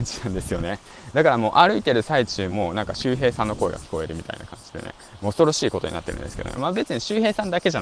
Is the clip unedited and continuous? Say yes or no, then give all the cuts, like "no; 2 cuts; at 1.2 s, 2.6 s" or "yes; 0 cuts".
no; 2 cuts; at 2.5 s, 6.6 s